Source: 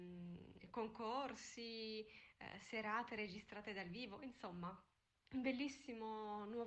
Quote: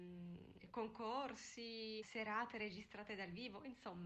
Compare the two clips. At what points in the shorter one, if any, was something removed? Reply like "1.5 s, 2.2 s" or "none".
2.0 s